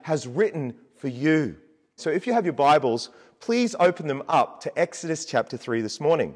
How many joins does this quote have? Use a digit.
1